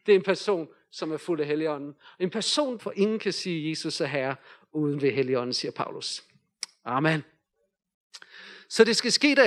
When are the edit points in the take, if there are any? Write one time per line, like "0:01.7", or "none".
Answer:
0:02.8